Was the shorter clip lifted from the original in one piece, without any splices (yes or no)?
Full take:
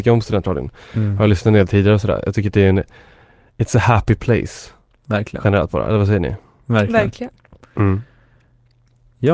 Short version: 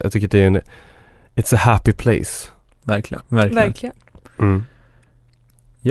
no